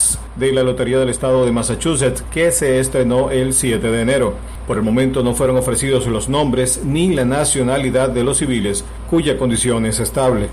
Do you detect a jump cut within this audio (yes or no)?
yes